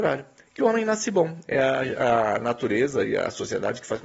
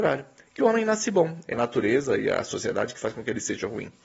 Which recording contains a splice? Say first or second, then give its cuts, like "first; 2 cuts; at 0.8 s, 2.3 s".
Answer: second; 1 cut; at 1.5 s